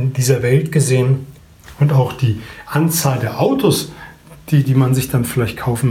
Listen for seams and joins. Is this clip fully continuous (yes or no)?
no